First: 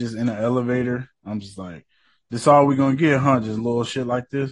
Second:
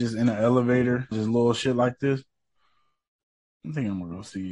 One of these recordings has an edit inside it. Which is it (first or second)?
second